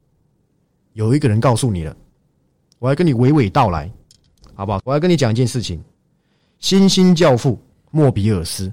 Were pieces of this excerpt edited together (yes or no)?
yes